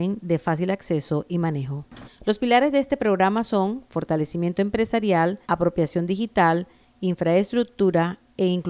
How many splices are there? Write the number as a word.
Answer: two